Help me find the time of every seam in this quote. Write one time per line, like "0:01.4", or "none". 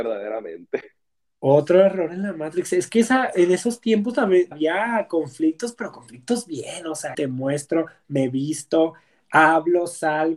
0:04.5
0:07.1